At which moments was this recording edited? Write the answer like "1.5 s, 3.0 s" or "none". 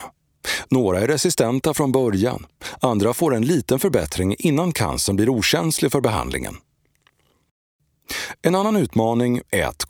none